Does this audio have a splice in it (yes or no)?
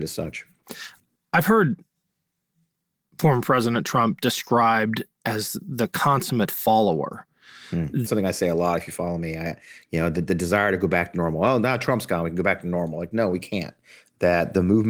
yes